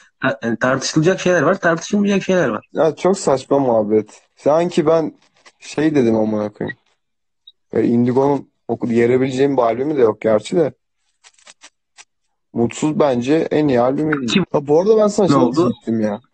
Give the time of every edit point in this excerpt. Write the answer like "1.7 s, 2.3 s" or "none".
4.3 s, 14.4 s